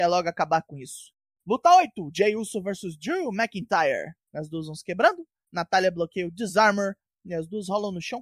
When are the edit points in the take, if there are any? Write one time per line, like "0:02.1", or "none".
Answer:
0:01.4
0:04.3